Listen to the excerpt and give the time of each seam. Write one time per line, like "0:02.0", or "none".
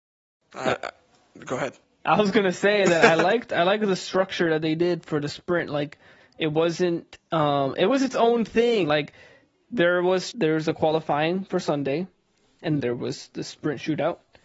0:08.8
0:10.3
0:12.8